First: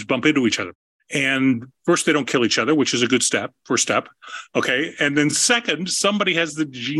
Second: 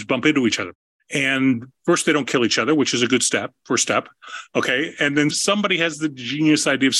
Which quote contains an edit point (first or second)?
second